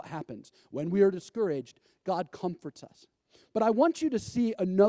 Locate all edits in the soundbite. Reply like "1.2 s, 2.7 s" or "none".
none